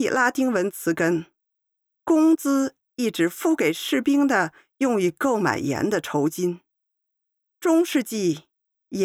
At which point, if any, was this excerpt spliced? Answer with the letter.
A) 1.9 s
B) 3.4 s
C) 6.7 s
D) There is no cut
A